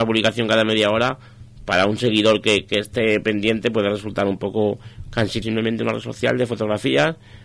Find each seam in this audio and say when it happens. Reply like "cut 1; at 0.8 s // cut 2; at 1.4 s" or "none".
cut 1; at 5.4 s

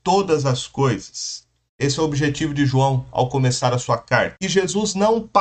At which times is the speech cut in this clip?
cut 1; at 1.7 s // cut 2; at 4.4 s

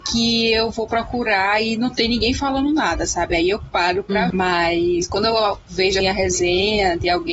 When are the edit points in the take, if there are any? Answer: cut 1; at 4.3 s // cut 2; at 6.0 s

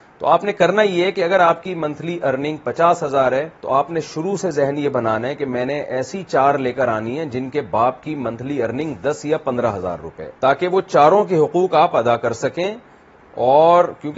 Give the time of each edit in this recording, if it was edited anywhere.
cut 1; at 3.6 s // cut 2; at 10.4 s

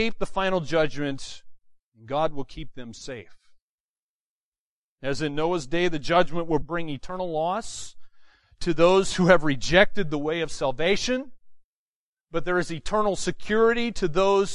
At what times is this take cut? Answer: cut 1; at 6.6 s

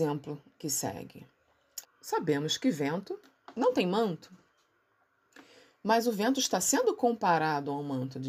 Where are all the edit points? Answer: cut 1; at 1.8 s

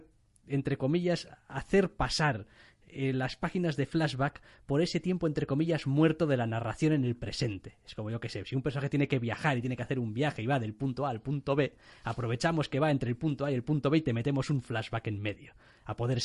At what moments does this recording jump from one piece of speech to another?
none

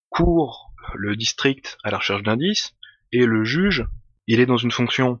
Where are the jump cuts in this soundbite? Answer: none

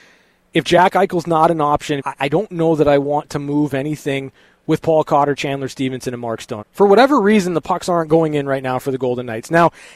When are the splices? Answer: cut 1; at 2.0 s // cut 2; at 6.6 s

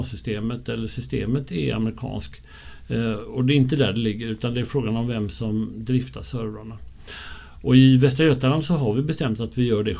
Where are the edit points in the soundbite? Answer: none

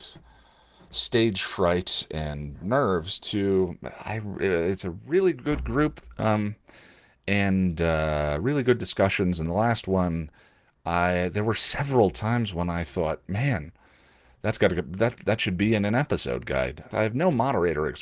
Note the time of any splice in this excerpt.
cut 1; at 16.9 s

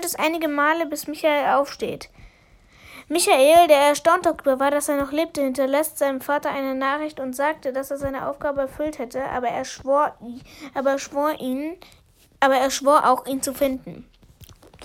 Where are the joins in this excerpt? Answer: none

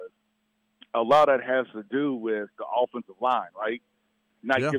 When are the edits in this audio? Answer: cut 1; at 2.5 s

